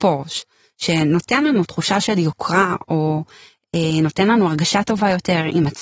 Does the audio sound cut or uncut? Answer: uncut